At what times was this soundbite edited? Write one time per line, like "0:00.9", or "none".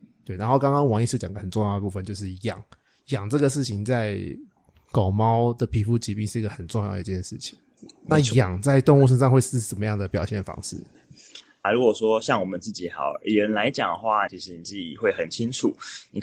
0:11.6
0:14.3